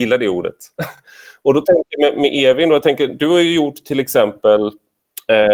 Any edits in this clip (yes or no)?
no